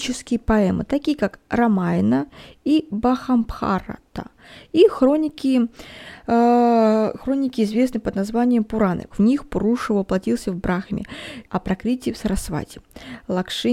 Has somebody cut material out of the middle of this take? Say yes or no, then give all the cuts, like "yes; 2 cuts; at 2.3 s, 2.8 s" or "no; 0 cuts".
yes; 2 cuts; at 9.1 s, 11.4 s